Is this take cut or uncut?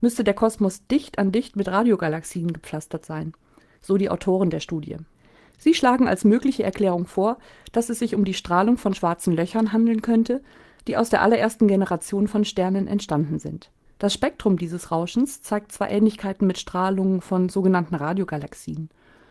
cut